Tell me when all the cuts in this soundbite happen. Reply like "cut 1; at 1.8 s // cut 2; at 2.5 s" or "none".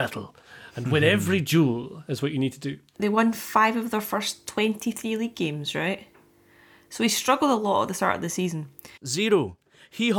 cut 1; at 2.9 s // cut 2; at 9.0 s